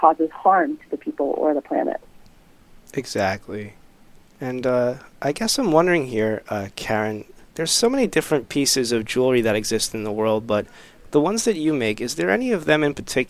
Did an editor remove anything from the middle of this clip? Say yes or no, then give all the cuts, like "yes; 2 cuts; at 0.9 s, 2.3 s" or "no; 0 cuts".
no; 0 cuts